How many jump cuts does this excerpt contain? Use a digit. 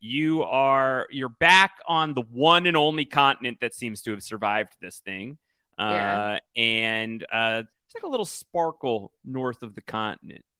1